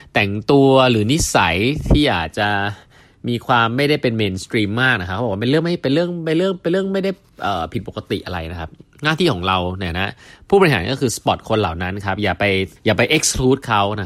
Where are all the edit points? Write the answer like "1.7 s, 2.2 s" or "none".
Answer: 12.8 s